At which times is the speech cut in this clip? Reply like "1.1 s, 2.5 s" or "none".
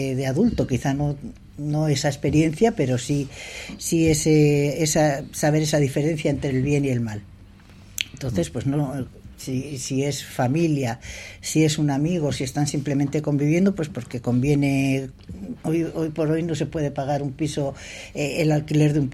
none